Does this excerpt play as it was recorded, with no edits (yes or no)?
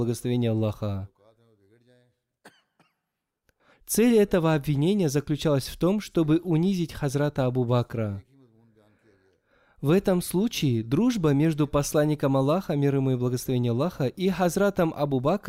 no